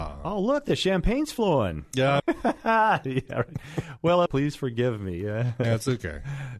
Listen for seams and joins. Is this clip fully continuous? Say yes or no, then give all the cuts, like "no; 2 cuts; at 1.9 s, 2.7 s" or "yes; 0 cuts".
no; 2 cuts; at 2.2 s, 4.3 s